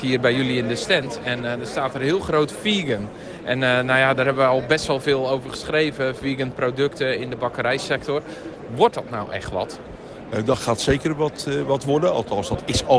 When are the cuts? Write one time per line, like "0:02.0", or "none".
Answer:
none

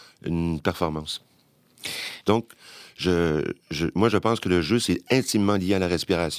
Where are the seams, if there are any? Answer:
0:02.2
0:03.6

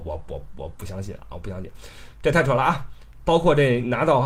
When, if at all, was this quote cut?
0:03.2

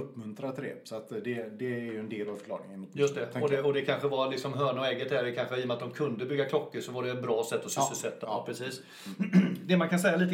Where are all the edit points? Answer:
0:08.2

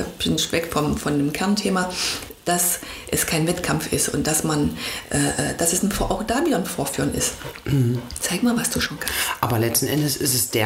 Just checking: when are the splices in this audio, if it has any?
none

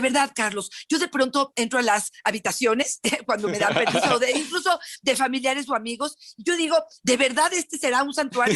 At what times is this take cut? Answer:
none

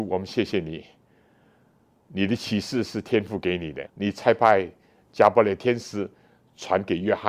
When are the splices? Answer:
0:03.9

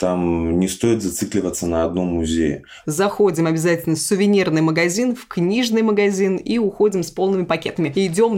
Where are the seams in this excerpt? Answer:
0:02.8

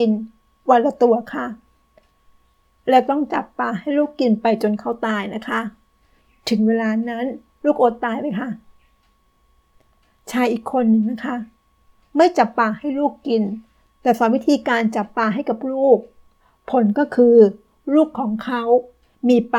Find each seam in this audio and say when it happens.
none

